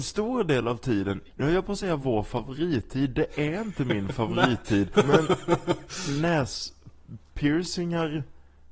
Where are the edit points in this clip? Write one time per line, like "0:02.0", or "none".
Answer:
0:01.3
0:04.9